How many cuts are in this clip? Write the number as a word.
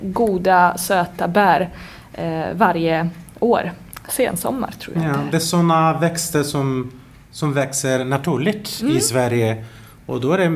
zero